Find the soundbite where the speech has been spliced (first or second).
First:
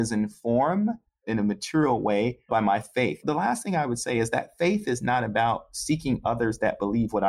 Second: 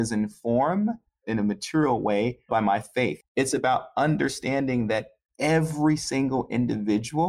second